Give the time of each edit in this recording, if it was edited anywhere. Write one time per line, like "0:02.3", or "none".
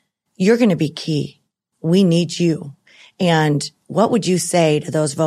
none

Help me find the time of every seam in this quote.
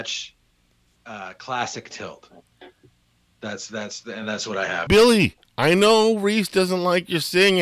0:01.0
0:04.9

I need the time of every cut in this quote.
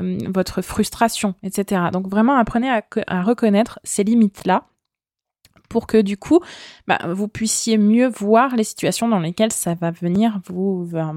none

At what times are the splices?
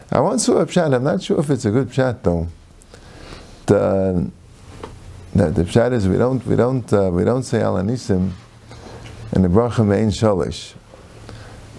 0:03.6

